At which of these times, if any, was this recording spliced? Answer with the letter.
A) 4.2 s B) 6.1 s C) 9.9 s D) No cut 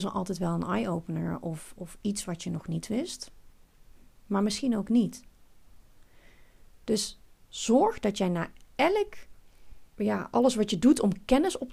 C